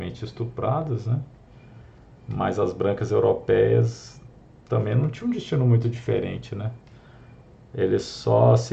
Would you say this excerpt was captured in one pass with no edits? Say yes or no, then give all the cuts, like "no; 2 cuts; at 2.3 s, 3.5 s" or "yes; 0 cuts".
yes; 0 cuts